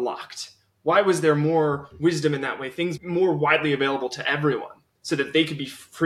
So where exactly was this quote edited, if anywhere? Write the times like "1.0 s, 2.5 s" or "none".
3.0 s